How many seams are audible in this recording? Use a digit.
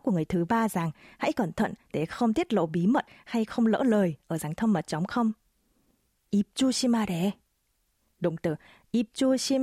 2